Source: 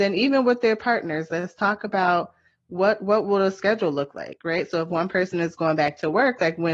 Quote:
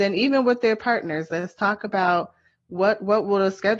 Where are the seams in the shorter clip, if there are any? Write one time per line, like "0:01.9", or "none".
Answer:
none